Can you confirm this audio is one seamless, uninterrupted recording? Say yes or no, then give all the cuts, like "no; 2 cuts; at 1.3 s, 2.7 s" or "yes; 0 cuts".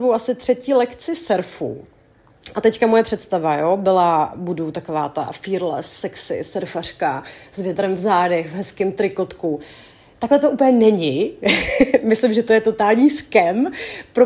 yes; 0 cuts